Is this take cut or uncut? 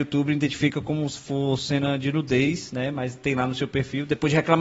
uncut